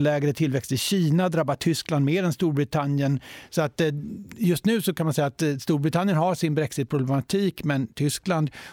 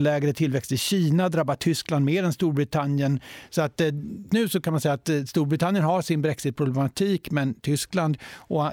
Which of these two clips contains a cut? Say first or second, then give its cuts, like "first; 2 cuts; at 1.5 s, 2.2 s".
second; 1 cut; at 4.3 s